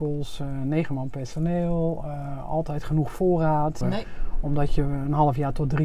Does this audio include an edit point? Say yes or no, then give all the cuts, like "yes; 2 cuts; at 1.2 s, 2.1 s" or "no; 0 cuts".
yes; 1 cut; at 3.8 s